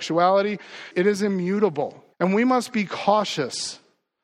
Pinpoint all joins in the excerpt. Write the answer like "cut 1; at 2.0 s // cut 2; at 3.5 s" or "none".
cut 1; at 0.9 s // cut 2; at 2.1 s